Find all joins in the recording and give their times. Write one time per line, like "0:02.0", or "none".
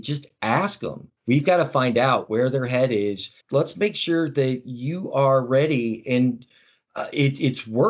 0:01.2
0:03.4